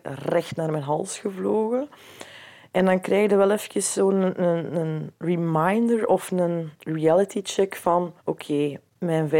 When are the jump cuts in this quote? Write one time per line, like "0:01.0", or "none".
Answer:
0:08.2